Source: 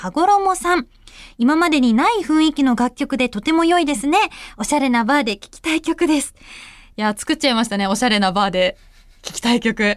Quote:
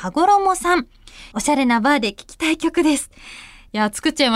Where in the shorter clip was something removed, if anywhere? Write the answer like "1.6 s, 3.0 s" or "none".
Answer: 1.3 s